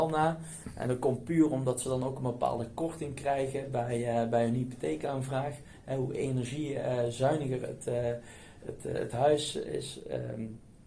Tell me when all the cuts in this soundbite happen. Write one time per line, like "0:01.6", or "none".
none